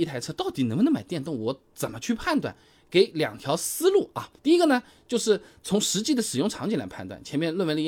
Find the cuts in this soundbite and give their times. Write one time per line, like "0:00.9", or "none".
0:04.4